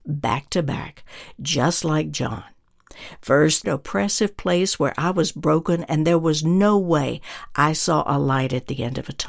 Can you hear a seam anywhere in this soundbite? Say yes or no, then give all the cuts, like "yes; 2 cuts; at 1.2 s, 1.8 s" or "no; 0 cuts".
yes; 1 cut; at 3.6 s